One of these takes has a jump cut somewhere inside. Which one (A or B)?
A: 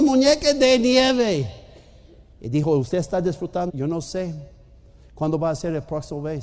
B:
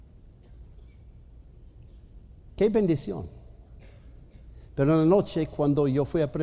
A